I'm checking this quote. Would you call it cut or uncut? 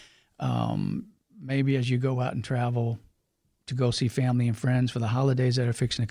uncut